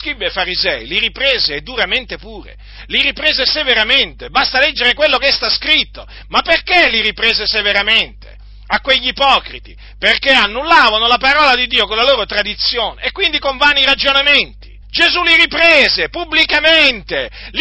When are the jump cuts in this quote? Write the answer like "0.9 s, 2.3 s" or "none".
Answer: 14.8 s